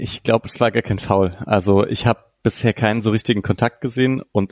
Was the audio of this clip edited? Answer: no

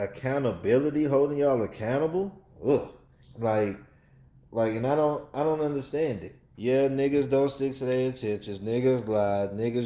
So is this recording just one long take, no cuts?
no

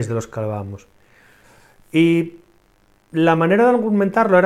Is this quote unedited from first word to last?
yes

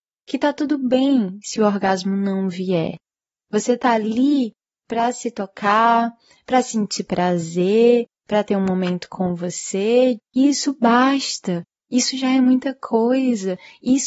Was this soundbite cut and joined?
yes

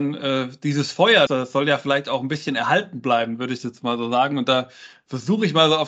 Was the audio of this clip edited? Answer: yes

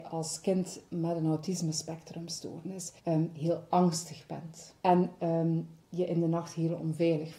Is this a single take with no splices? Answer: no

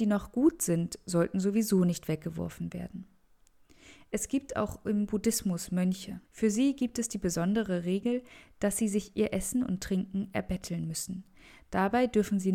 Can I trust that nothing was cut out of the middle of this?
no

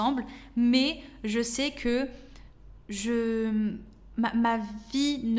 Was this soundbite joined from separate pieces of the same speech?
no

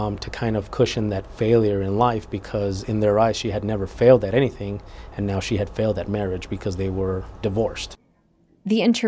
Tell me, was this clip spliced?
yes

